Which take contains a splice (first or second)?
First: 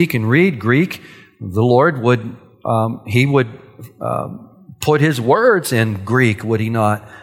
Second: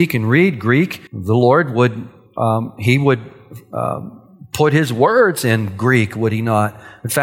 second